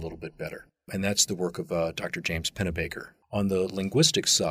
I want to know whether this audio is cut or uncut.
uncut